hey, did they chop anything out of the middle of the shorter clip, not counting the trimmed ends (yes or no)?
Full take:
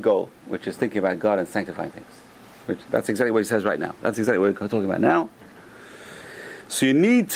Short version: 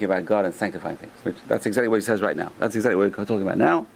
yes